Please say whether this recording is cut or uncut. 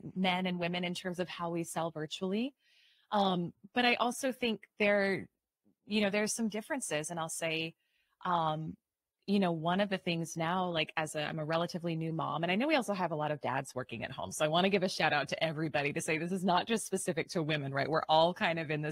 uncut